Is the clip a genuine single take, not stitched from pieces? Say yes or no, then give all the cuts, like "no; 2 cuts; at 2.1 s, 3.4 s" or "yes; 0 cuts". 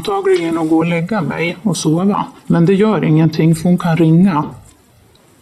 no; 1 cut; at 2.4 s